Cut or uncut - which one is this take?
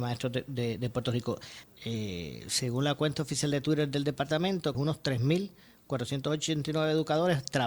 cut